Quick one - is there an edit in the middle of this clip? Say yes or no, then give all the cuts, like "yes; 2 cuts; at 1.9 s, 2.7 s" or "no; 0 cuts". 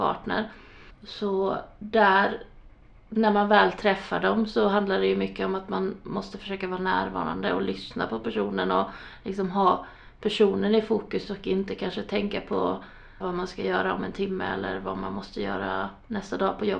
yes; 2 cuts; at 0.9 s, 13.2 s